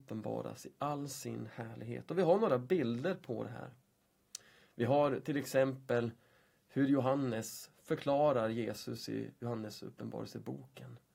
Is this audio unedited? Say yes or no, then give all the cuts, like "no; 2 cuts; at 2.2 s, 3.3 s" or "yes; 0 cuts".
yes; 0 cuts